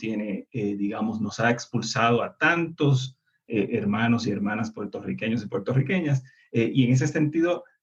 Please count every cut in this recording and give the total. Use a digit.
0